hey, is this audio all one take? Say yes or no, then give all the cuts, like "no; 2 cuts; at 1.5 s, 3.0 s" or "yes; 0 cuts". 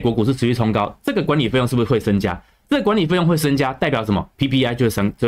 yes; 0 cuts